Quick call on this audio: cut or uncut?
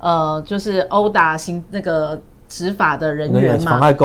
uncut